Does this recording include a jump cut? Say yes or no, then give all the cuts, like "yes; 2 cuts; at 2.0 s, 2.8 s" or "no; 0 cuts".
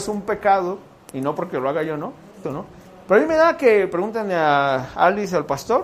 yes; 1 cut; at 2.4 s